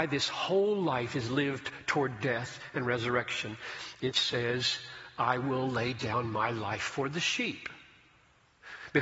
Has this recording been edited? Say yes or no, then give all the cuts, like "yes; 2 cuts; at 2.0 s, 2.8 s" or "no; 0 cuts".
no; 0 cuts